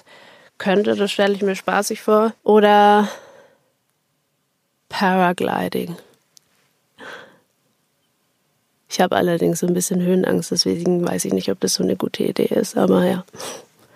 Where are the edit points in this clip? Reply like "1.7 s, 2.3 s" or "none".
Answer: 2.4 s